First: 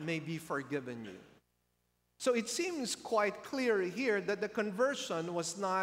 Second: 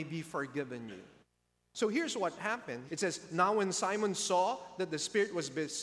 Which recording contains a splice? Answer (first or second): second